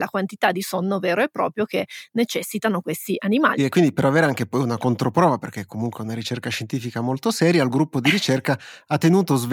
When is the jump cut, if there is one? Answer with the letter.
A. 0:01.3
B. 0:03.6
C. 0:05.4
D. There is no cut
B